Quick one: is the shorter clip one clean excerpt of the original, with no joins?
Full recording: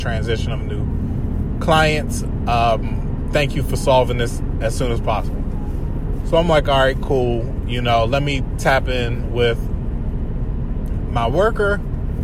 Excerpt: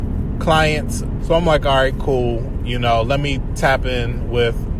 no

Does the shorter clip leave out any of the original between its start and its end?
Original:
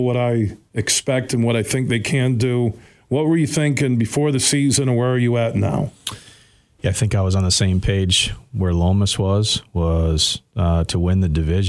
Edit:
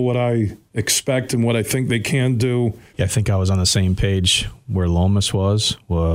yes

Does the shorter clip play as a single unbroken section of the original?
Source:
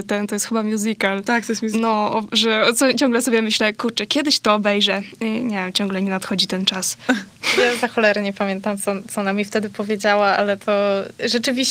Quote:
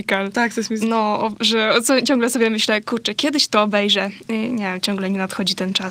yes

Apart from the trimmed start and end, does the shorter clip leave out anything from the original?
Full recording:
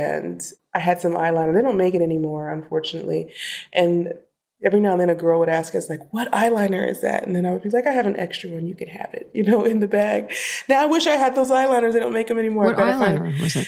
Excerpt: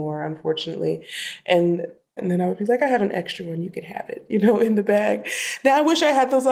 yes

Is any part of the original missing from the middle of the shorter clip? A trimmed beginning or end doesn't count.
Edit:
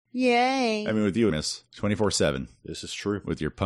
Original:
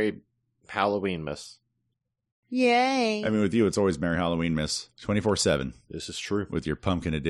yes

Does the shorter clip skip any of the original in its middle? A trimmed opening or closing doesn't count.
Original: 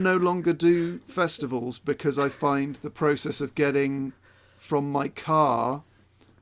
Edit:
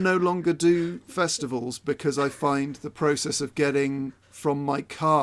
yes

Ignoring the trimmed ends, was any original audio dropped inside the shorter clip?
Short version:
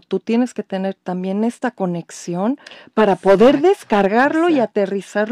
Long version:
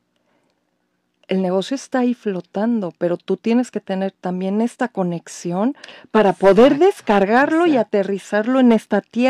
no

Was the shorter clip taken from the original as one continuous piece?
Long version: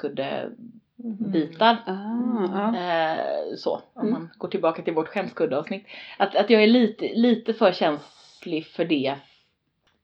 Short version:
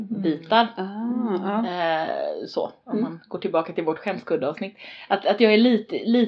yes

